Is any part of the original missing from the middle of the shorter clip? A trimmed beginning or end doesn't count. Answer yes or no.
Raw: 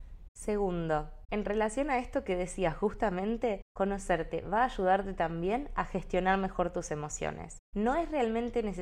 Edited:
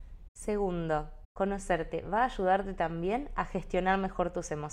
yes